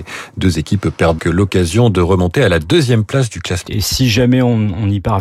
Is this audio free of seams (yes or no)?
no